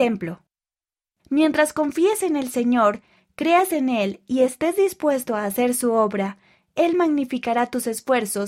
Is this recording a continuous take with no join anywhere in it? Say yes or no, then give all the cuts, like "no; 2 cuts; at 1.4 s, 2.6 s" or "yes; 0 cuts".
no; 1 cut; at 1.2 s